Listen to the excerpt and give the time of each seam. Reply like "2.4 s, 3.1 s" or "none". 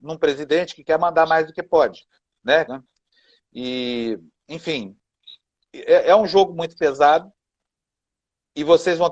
2.7 s